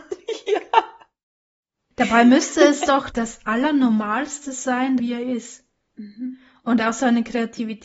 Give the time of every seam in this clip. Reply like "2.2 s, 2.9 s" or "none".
3.1 s, 5.0 s

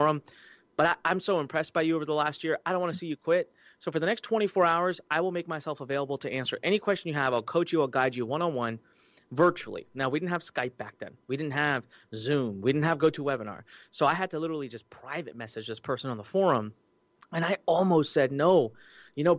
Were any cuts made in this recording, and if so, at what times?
none

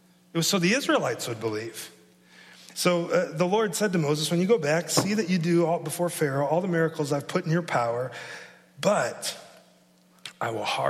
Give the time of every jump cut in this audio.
2.7 s

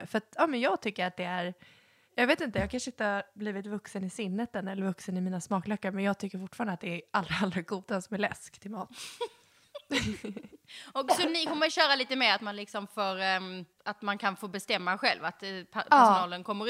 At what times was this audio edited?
none

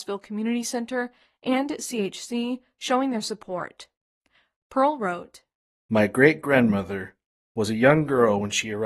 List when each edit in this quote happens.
7.4 s

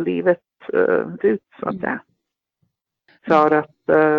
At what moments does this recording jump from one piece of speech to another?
1.2 s, 3.2 s

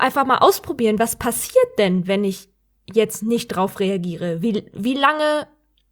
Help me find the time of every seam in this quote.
none

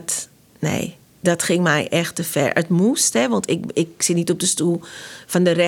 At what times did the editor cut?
none

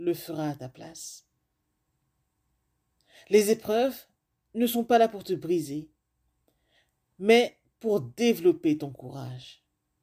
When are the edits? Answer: none

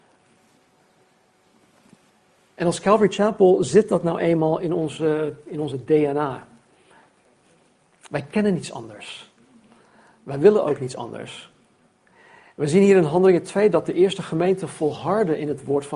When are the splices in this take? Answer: none

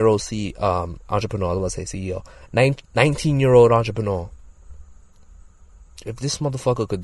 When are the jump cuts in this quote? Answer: none

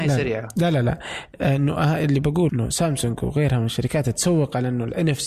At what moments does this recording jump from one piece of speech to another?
2.5 s

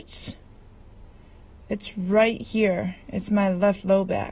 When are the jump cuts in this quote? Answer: none

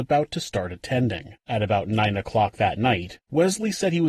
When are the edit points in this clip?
1.4 s

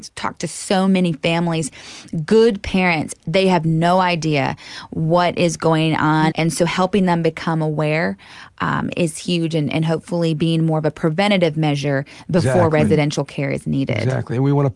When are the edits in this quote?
6.3 s

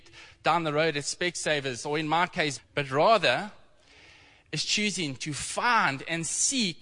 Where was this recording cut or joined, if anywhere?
2.6 s

